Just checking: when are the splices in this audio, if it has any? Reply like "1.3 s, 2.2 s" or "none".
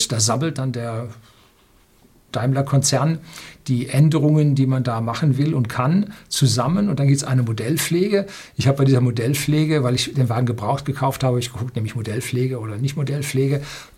none